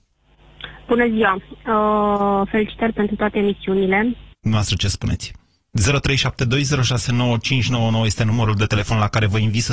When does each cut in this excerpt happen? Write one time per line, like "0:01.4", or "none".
0:04.3